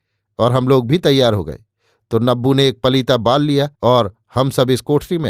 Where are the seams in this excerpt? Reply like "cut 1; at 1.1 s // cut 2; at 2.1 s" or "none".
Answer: cut 1; at 3.7 s